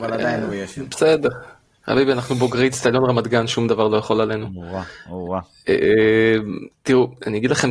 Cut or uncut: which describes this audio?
uncut